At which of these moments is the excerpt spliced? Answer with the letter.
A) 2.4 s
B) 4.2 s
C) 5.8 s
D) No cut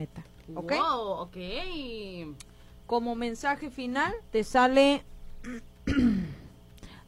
B